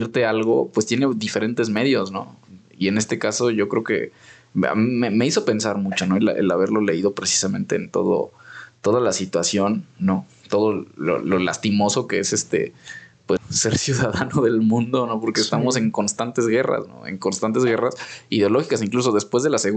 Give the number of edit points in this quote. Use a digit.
1